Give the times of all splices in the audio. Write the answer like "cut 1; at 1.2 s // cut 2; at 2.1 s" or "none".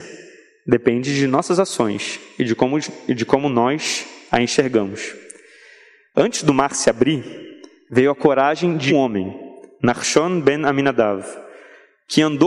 cut 1; at 8.9 s